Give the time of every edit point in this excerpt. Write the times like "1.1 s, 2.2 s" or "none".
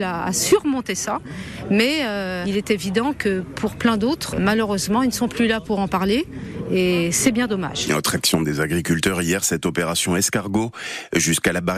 4.3 s

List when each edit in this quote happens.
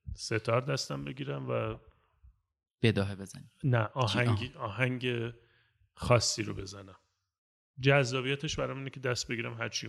none

